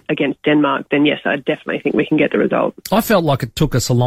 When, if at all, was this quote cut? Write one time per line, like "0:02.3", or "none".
0:02.8